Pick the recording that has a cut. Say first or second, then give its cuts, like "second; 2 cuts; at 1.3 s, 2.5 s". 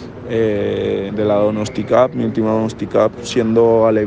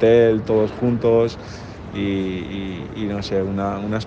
first; 1 cut; at 1.1 s